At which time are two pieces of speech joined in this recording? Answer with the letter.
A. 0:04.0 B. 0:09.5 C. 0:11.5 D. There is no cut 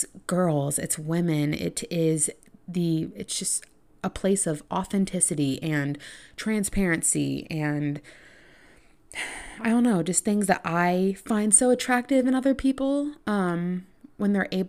D